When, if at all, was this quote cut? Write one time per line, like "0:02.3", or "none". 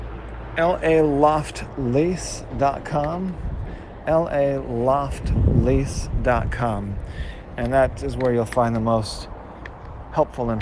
none